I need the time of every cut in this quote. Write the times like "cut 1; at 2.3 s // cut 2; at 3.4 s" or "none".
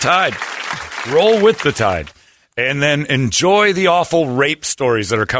none